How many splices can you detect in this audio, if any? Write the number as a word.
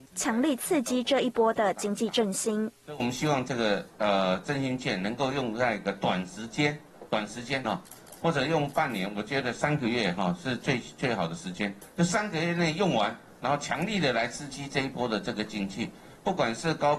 one